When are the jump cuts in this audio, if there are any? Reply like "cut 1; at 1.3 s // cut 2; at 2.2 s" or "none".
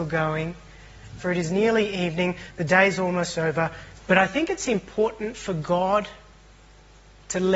cut 1; at 1.2 s // cut 2; at 3.9 s